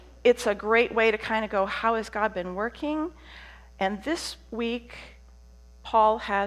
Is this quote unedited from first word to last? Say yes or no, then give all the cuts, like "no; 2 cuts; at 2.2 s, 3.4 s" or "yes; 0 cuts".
yes; 0 cuts